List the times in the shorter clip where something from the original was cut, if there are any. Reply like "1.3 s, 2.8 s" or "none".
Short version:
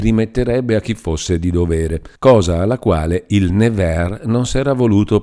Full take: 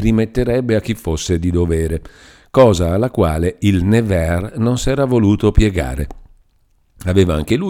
2.1 s